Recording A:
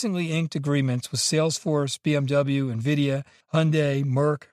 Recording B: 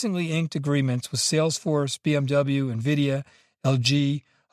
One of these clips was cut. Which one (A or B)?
A